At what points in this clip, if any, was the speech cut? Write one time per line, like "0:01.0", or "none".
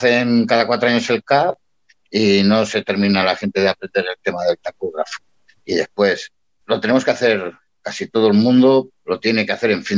0:06.6
0:08.9